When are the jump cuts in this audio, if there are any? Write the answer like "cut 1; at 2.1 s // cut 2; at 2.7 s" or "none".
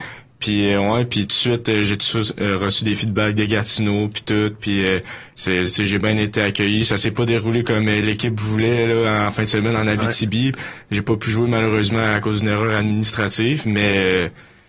none